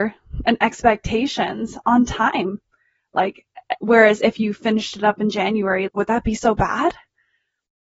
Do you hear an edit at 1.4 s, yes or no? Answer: no